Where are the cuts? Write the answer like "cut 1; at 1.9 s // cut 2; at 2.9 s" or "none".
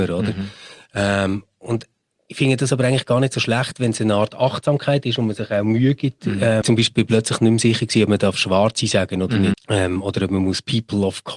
cut 1; at 6.6 s // cut 2; at 9.5 s